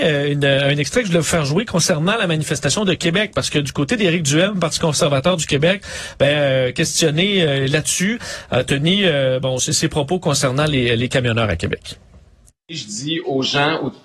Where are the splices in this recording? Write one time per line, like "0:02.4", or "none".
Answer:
none

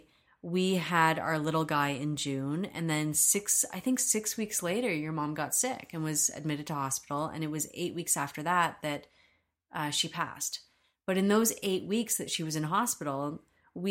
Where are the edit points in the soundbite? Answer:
none

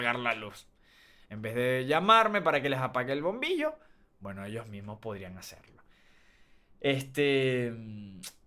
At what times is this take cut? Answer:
none

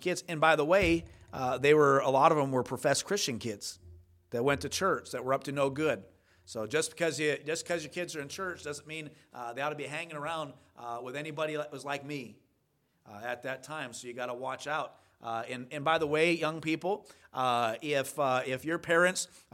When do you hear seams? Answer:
none

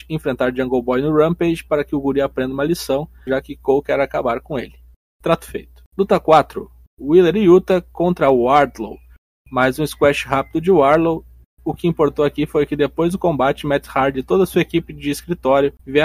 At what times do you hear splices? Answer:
0:03.3

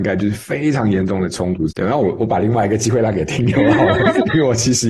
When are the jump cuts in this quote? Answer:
0:01.7

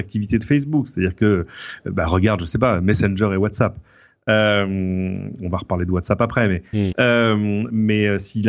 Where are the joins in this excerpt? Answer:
0:06.9

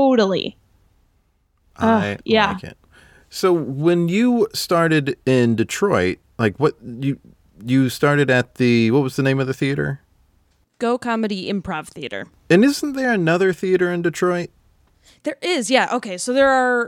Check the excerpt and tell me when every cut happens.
none

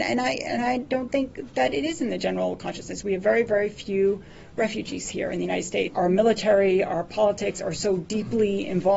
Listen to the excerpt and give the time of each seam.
0:05.9

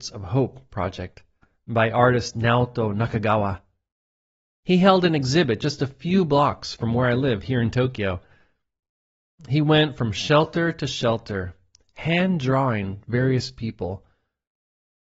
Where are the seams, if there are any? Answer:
none

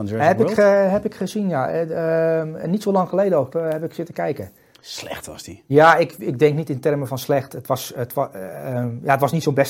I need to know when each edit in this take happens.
0:03.5

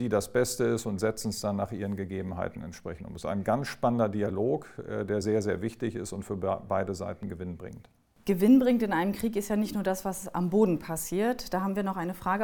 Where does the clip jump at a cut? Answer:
none

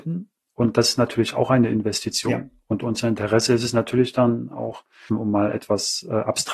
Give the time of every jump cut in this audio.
0:05.1

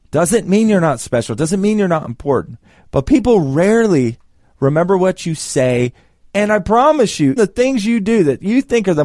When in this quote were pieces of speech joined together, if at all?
0:06.2
0:07.4

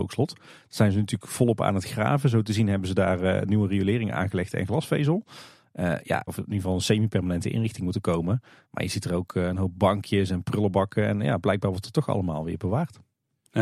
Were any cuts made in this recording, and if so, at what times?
0:06.3
0:08.6

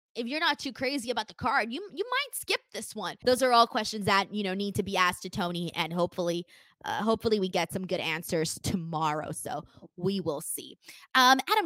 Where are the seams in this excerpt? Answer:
0:03.2

